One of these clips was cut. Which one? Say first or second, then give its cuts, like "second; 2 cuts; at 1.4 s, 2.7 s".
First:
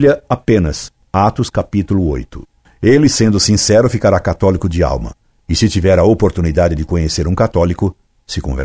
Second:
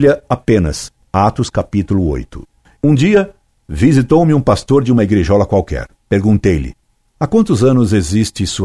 second; 1 cut; at 2.8 s